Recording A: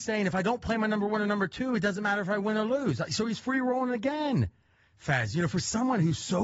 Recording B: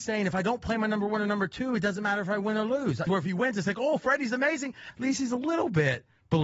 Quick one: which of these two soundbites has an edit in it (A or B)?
B